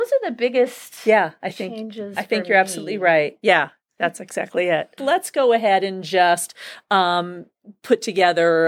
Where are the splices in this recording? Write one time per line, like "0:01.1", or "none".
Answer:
0:05.0

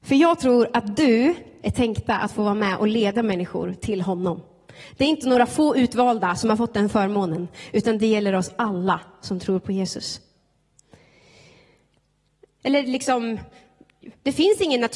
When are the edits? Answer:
0:01.6
0:12.6

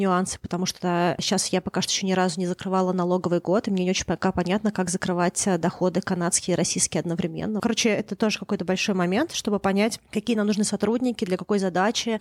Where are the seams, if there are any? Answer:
0:07.6

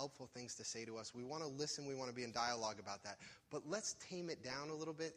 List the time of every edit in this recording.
none

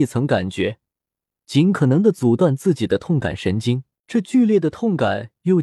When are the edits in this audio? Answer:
0:04.0

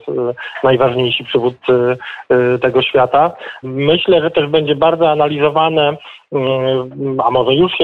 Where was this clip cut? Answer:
0:03.6

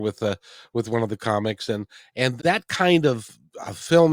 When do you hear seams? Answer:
0:02.4

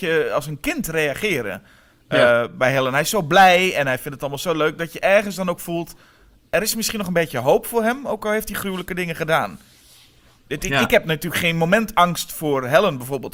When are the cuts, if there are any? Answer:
none

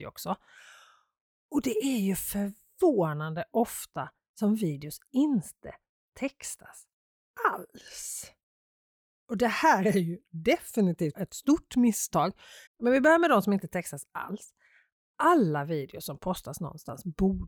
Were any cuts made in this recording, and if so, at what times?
0:11.1
0:12.7

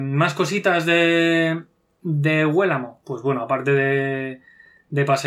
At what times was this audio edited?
none

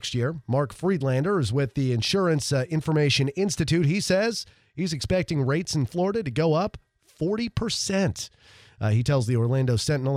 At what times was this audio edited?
none

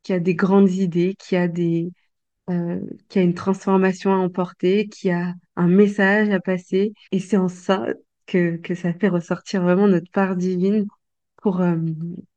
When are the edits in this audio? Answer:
0:07.1

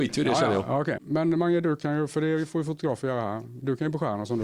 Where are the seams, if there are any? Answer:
0:01.0

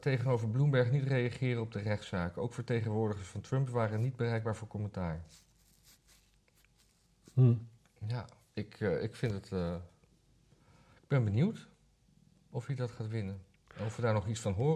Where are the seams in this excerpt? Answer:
none

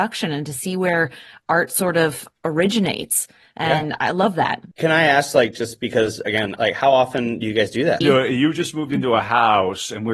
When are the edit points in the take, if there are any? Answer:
0:04.7
0:06.6
0:08.0

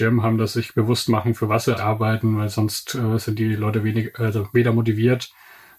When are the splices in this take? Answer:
0:01.8

